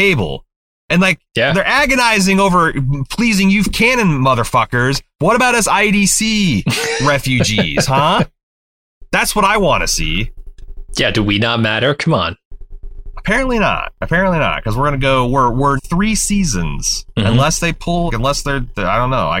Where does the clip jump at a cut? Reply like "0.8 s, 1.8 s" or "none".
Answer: 15.8 s, 18.1 s